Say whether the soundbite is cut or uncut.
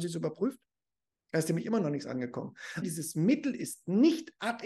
cut